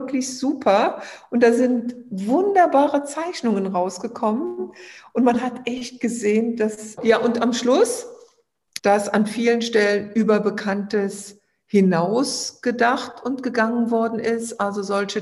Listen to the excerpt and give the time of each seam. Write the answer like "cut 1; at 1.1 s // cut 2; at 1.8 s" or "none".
cut 1; at 7.0 s // cut 2; at 8.8 s